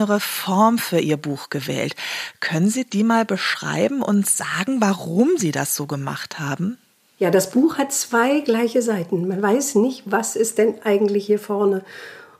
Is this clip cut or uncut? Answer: uncut